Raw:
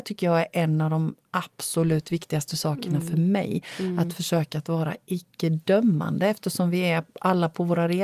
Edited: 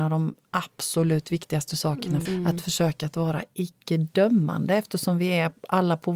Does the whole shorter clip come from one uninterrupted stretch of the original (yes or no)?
no